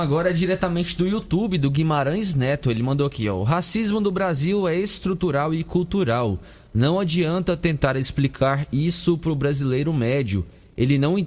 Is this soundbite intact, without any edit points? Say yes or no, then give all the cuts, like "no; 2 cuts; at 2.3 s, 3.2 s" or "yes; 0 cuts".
yes; 0 cuts